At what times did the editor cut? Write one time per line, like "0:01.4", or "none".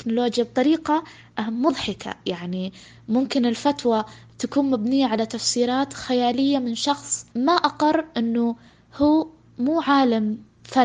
0:07.3